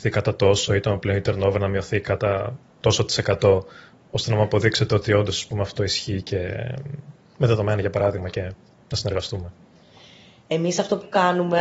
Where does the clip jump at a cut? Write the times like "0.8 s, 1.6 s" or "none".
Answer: none